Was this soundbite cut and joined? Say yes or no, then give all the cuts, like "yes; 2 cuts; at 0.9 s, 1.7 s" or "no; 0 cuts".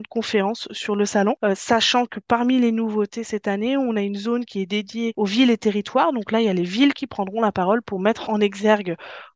no; 0 cuts